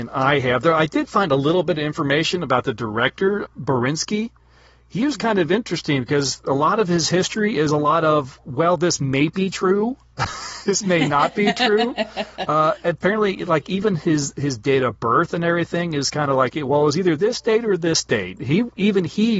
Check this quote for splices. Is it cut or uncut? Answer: cut